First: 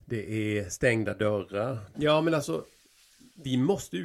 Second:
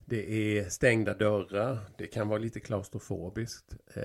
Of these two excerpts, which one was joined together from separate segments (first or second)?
first